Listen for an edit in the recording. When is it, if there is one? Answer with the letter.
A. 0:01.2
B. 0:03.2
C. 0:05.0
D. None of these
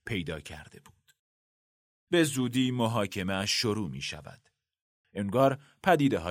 C